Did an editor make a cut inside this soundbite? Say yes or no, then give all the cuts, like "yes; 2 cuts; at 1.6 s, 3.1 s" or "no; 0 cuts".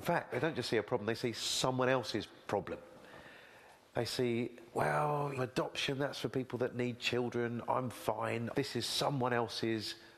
yes; 2 cuts; at 5.4 s, 8.5 s